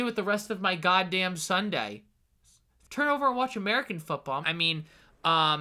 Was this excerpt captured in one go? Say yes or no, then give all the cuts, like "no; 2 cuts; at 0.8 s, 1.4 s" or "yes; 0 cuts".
no; 2 cuts; at 2.8 s, 4.4 s